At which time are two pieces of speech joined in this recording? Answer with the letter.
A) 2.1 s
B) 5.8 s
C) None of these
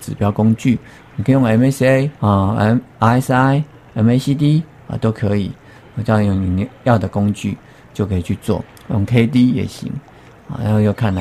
A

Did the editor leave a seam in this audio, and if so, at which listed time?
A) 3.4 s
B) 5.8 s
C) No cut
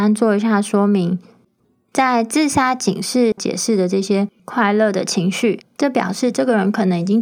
A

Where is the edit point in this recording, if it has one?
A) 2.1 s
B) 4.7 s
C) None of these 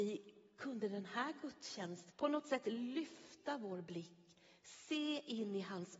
A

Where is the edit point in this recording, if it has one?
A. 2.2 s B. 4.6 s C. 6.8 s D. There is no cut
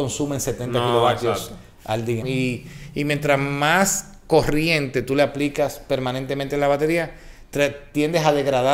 A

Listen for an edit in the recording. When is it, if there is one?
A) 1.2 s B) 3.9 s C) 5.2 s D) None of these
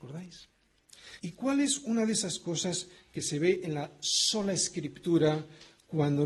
A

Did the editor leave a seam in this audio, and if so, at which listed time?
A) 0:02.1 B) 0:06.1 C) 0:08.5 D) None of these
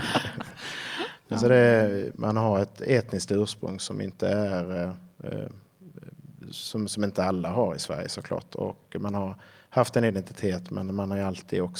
A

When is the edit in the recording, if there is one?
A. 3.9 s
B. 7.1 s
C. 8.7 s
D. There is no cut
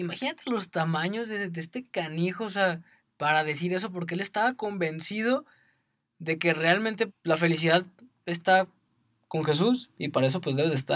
B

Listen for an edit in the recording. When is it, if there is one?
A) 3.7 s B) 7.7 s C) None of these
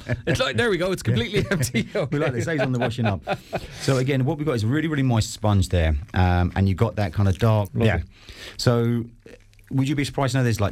B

